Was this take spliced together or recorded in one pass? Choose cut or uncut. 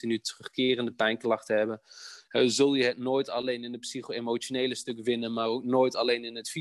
uncut